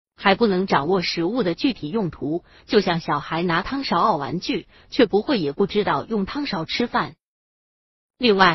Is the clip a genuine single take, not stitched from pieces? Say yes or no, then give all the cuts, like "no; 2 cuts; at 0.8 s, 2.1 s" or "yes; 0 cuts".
yes; 0 cuts